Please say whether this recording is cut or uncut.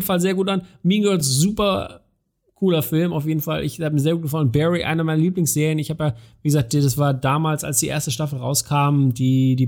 uncut